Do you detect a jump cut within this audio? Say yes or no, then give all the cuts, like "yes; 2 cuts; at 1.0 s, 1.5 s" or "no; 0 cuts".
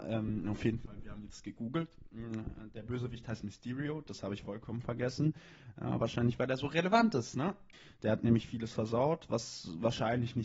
no; 0 cuts